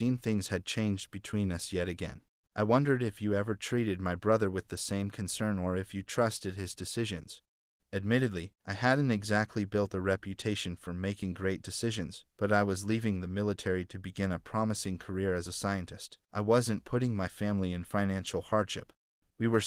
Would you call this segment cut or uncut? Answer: uncut